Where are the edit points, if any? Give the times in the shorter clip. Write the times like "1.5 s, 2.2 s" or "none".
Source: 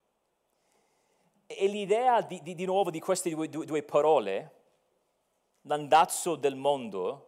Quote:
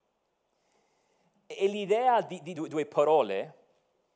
2.5 s